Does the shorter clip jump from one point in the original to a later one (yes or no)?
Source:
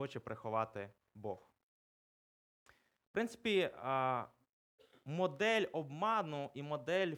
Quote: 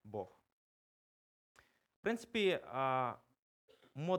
no